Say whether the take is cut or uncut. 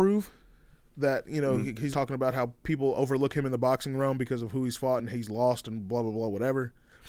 cut